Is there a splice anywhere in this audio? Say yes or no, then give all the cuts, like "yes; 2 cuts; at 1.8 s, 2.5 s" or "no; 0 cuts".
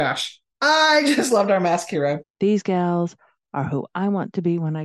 yes; 1 cut; at 2.2 s